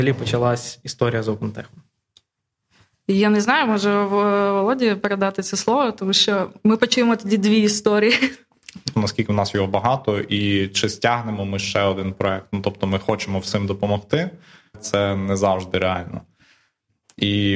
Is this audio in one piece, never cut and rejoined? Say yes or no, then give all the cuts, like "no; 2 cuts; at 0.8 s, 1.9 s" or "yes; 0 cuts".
no; 2 cuts; at 8.9 s, 14.7 s